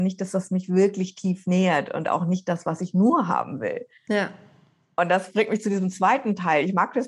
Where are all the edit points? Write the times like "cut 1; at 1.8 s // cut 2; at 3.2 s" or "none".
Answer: none